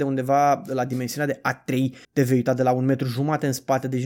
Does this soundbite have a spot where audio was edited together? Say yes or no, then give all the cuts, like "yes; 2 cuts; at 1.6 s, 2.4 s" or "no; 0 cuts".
yes; 1 cut; at 2.0 s